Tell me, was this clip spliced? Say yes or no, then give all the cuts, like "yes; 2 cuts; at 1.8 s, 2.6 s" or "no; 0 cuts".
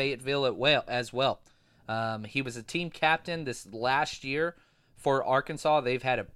no; 0 cuts